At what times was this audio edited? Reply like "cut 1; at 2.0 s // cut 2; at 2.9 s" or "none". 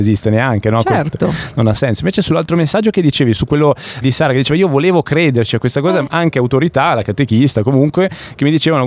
cut 1; at 4.0 s // cut 2; at 6.1 s